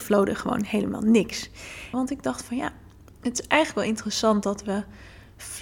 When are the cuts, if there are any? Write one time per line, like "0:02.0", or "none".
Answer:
0:01.9